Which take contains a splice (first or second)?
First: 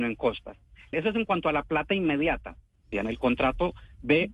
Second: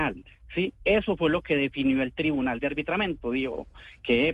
first